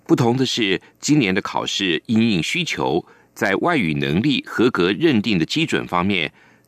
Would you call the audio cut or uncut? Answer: uncut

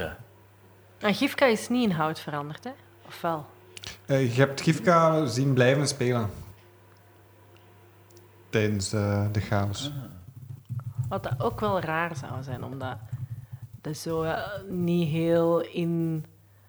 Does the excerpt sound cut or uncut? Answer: uncut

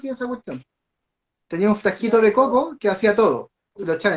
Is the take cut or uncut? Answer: uncut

